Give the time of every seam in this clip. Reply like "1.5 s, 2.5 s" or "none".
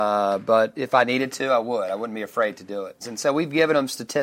3.0 s

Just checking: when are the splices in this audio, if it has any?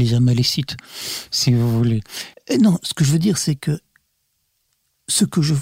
2.3 s

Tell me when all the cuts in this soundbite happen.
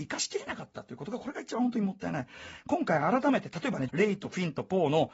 3.9 s

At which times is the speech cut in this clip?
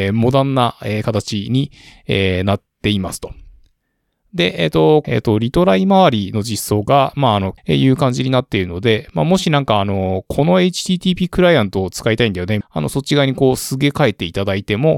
5.0 s, 7.6 s, 12.6 s

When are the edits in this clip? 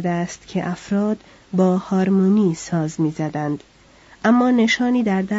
none

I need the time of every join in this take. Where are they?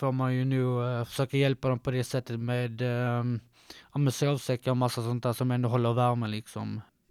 none

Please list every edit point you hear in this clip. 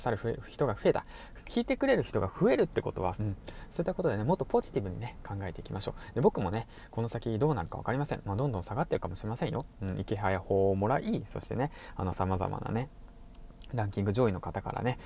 3.2 s

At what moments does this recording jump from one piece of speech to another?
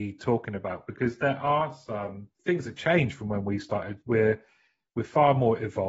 2.4 s

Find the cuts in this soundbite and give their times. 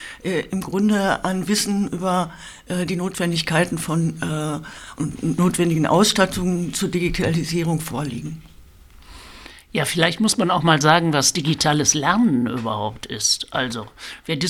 none

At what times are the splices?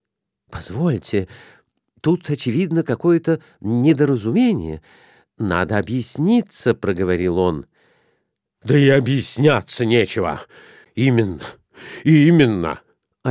10.8 s

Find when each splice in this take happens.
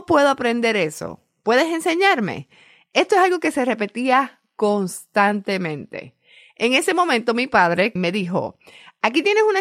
8.0 s

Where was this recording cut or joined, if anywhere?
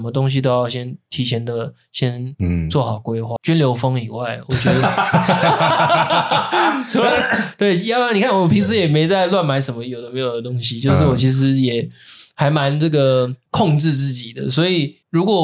3.4 s

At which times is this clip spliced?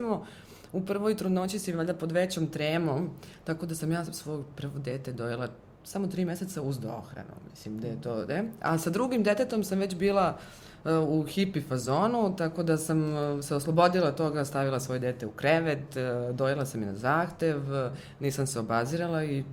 none

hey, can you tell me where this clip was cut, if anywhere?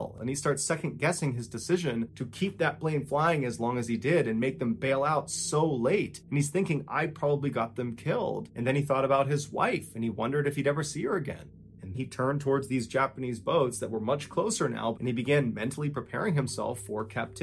11.9 s, 14.9 s

